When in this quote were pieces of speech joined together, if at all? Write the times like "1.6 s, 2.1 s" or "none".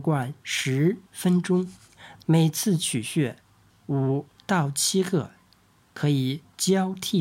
2.2 s